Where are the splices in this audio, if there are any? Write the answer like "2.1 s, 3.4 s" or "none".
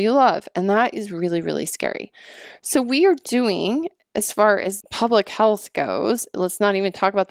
4.8 s